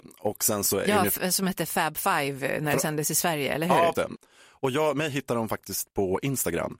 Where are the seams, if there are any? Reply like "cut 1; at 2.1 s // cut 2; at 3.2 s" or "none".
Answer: cut 1; at 3.9 s